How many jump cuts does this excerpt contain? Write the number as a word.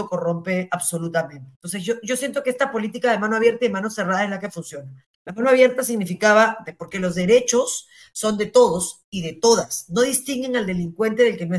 two